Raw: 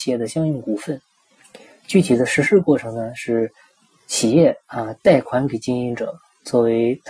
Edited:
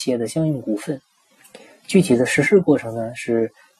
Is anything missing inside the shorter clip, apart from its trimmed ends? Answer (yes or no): no